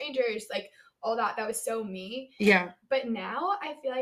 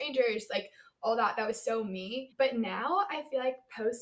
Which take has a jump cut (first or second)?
second